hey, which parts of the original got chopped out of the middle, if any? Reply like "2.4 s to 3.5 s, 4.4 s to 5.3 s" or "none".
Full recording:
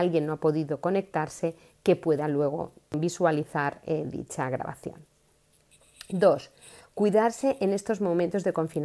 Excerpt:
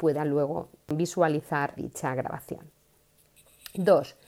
3.8 s to 4.1 s